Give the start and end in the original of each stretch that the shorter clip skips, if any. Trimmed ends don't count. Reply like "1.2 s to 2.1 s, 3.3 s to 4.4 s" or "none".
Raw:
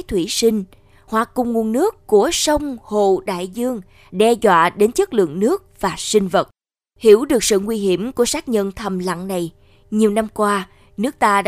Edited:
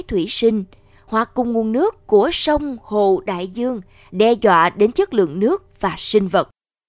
none